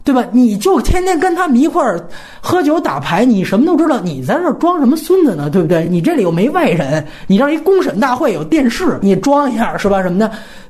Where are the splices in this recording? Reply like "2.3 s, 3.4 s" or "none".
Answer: none